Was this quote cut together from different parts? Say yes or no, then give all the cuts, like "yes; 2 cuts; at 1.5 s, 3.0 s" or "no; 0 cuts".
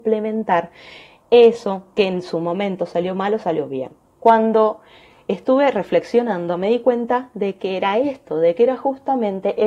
yes; 1 cut; at 4.0 s